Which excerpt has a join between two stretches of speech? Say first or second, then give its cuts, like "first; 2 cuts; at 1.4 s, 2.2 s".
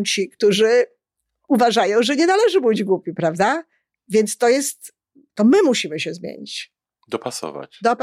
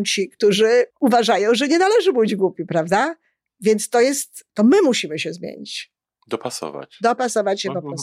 second; 2 cuts; at 0.9 s, 4.5 s